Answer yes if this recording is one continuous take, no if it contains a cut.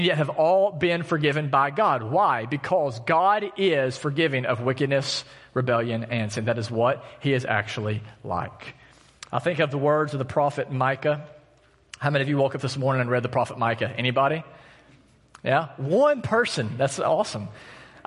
yes